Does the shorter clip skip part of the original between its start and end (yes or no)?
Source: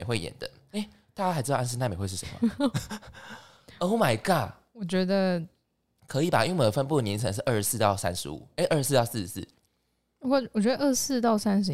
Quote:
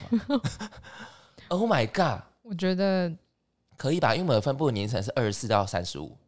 no